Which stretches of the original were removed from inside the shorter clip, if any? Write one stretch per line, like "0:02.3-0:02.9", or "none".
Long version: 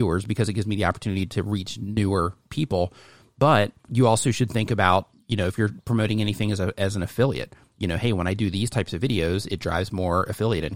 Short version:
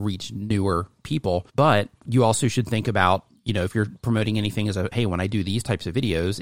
0:03.0-0:03.3
0:06.7-0:08.0